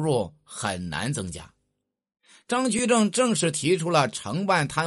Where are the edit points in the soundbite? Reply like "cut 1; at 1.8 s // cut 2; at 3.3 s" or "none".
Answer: none